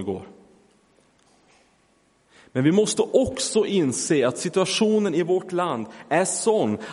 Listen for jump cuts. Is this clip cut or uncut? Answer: uncut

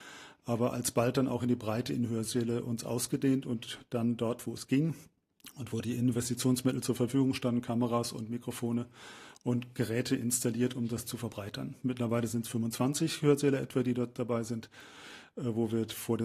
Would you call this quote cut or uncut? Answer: uncut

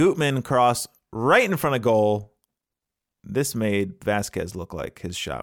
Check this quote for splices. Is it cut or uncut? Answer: uncut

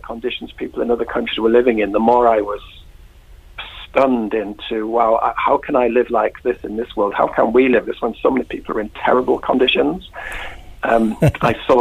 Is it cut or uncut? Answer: cut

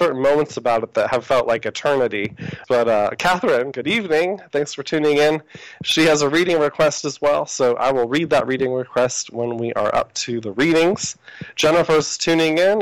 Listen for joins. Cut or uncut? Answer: cut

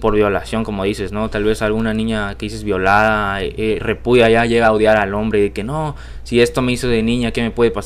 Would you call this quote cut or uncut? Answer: uncut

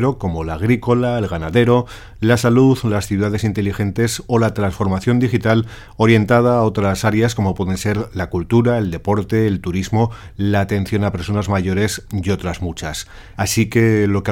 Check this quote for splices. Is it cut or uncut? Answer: cut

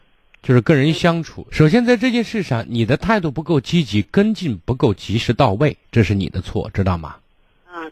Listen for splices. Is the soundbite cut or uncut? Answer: cut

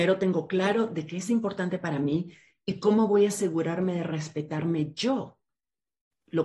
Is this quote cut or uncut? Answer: uncut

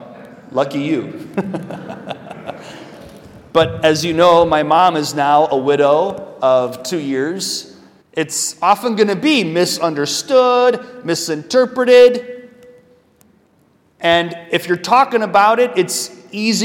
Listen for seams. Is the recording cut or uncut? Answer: cut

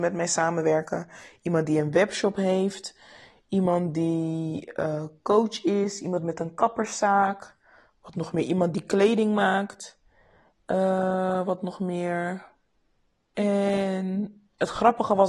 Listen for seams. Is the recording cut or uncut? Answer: cut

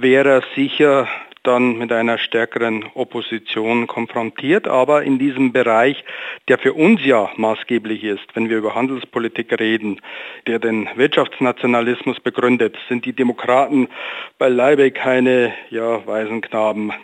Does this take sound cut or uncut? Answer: cut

